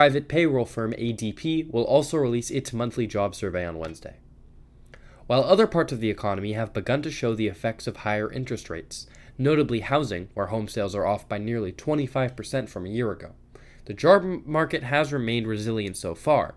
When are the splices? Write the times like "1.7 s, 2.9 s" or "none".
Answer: none